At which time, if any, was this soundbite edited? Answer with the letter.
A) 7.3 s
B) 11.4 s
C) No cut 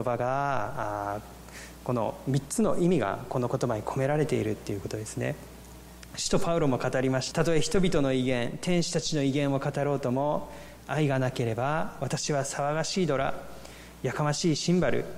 A